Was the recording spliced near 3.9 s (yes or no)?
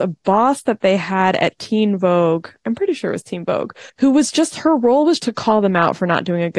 yes